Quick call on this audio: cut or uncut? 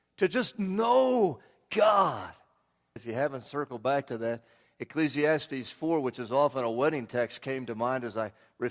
cut